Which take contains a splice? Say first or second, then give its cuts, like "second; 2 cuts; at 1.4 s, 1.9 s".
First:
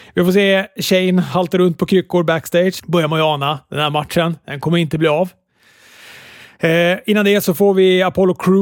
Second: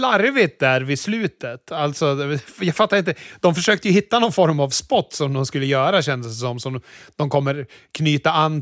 first; 1 cut; at 2.8 s